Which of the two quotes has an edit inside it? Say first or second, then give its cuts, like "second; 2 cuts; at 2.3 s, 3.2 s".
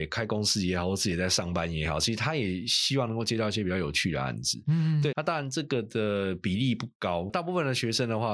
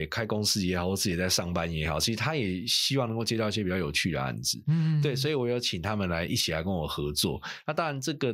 first; 2 cuts; at 5.1 s, 7.3 s